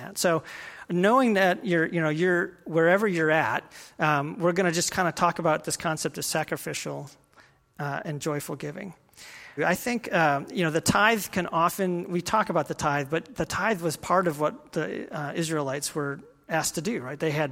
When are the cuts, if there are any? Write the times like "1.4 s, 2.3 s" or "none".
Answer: 9.6 s